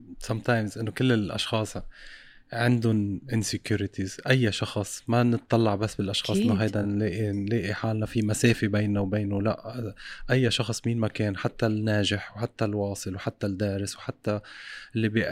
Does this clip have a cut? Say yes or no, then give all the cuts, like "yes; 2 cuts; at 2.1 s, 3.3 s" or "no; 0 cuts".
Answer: no; 0 cuts